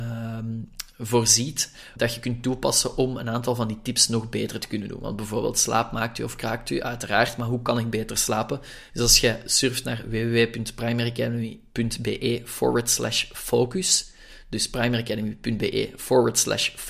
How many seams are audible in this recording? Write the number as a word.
two